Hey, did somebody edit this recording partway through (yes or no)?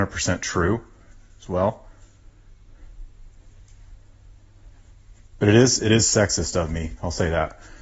no